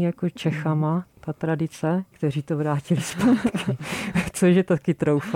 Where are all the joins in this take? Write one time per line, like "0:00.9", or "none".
0:02.1